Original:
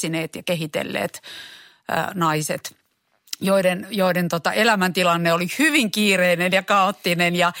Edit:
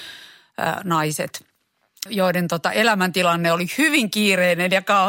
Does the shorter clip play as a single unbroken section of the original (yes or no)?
no